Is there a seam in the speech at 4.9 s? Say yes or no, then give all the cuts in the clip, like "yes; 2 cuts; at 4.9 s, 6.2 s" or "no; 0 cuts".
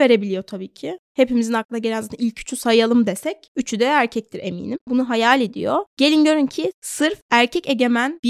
yes; 1 cut; at 4.9 s